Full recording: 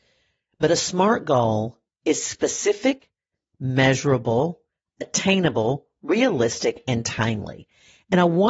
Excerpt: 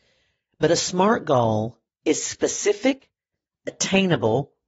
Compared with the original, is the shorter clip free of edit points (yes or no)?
no